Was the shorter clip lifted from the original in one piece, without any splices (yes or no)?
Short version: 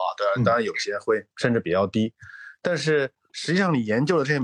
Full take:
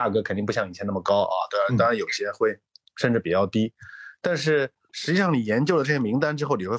no